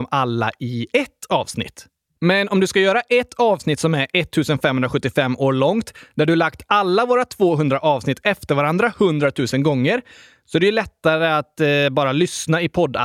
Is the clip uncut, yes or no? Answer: no